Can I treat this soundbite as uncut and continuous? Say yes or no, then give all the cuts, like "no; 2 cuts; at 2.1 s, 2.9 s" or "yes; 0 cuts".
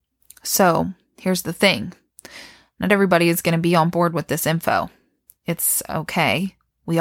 yes; 0 cuts